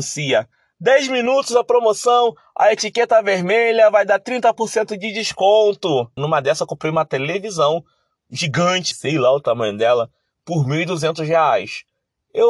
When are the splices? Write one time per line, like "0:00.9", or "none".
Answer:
0:06.2
0:08.9